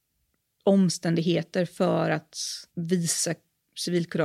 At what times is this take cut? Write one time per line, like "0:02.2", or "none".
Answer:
0:02.7